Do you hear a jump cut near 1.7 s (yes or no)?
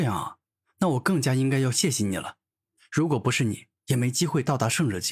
no